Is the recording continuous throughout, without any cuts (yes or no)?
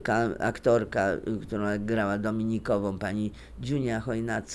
yes